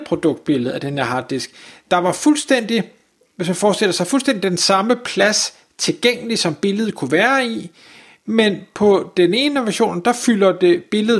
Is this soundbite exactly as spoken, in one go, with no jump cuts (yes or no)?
yes